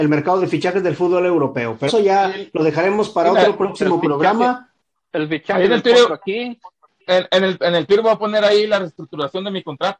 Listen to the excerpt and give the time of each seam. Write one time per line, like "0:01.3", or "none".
0:01.9
0:07.6